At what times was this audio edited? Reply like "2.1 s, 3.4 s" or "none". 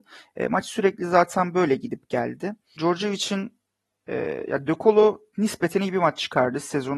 2.8 s